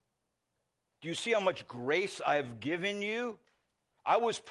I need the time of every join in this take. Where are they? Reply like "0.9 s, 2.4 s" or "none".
0.9 s

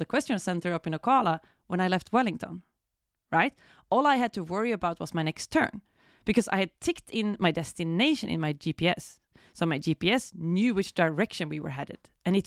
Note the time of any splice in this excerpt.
none

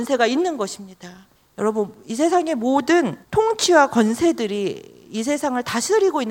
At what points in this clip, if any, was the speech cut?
1.4 s, 3.2 s

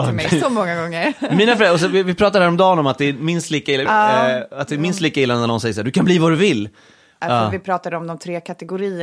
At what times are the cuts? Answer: 3.9 s, 7.2 s

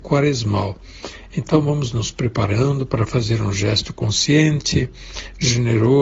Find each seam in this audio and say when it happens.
none

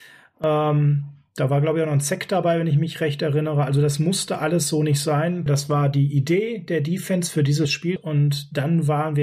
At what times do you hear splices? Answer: 5.5 s, 8.0 s

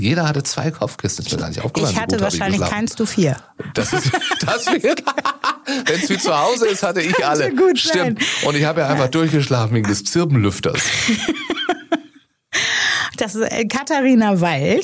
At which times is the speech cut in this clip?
none

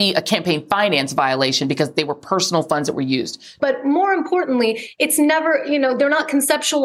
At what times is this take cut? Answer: 3.6 s, 5.0 s

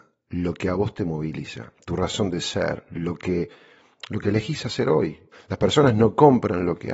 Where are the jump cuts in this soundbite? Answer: 5.3 s

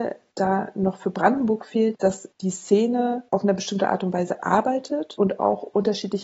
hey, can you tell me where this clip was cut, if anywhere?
1.9 s

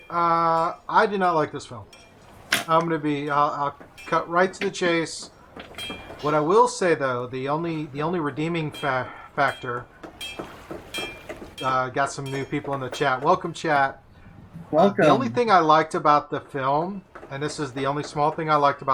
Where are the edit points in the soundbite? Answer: 6.2 s, 11.5 s

